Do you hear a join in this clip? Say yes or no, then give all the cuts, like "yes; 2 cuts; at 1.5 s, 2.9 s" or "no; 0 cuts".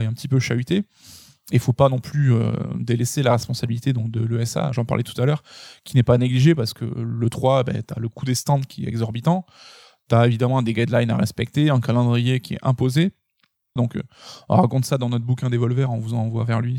yes; 2 cuts; at 4.7 s, 13.8 s